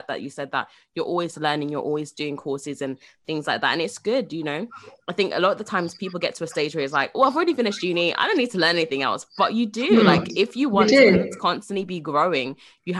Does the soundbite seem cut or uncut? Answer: uncut